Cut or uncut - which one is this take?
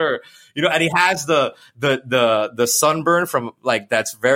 uncut